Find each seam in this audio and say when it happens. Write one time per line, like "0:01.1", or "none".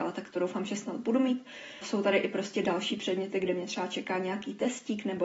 0:01.8